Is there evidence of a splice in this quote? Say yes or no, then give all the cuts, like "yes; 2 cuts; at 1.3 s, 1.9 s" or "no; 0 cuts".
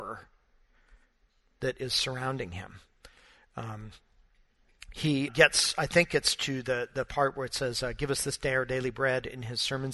yes; 1 cut; at 5.3 s